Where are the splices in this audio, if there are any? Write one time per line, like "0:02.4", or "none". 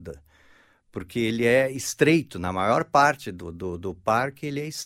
none